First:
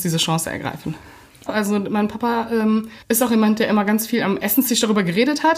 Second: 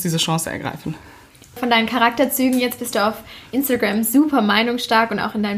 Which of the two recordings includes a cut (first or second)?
first